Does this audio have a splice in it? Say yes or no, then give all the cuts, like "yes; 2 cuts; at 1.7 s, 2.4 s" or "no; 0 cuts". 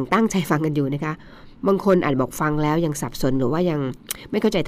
no; 0 cuts